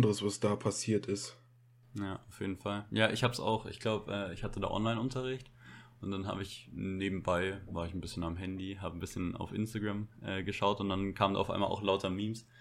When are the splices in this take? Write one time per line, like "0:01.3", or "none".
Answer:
none